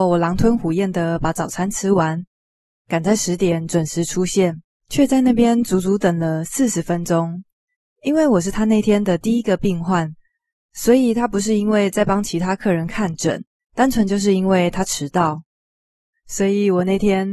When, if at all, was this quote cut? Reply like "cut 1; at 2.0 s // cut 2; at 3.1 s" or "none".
none